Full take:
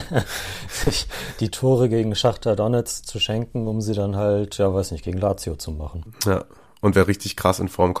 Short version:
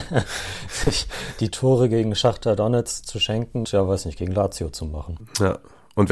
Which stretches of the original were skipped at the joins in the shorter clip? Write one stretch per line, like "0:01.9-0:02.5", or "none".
0:03.6-0:04.5